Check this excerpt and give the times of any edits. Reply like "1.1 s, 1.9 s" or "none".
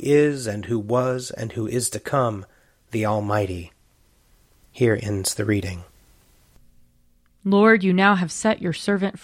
none